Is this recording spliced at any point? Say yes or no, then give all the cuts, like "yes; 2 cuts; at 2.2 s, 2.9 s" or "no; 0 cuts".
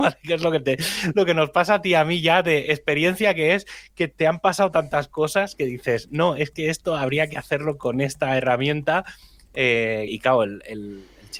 yes; 1 cut; at 10.1 s